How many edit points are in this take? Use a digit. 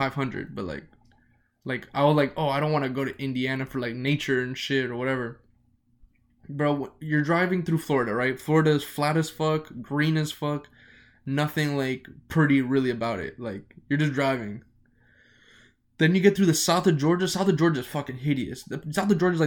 0